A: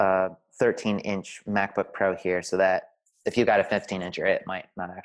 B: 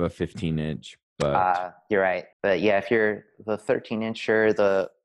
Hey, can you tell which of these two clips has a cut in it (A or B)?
B